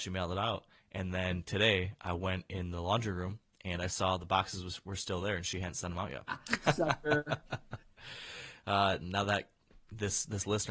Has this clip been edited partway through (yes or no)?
yes